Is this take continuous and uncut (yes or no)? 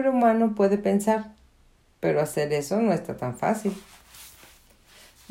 no